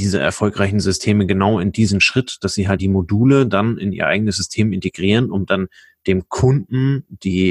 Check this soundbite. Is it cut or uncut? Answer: cut